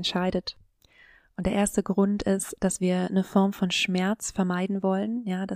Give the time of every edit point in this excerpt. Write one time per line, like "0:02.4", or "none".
none